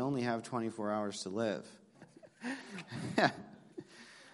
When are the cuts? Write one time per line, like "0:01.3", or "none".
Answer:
0:01.9